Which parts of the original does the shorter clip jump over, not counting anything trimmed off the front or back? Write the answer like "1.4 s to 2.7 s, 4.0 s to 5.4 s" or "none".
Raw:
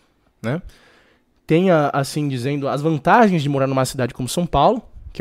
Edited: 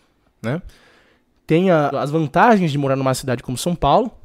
1.9 s to 2.6 s

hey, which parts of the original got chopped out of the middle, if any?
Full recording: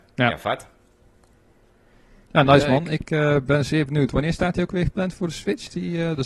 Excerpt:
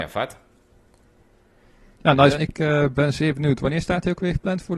2.6 s to 2.9 s

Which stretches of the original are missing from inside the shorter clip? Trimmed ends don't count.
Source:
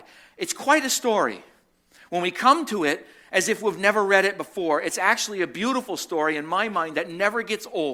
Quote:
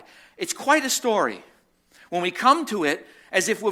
none

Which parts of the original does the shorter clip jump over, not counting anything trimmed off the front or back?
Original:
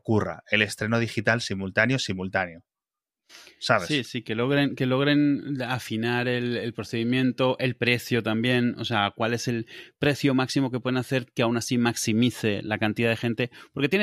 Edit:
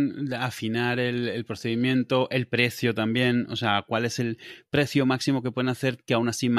none

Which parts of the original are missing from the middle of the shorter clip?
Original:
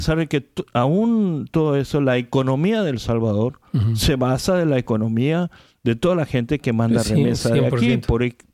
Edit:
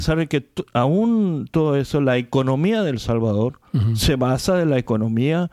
none

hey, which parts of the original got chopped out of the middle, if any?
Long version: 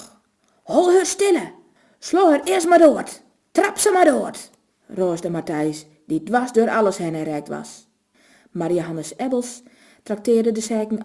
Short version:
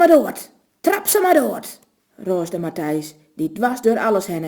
none

